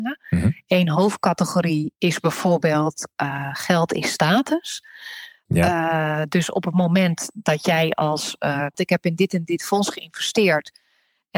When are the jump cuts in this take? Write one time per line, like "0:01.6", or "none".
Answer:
0:05.5
0:08.7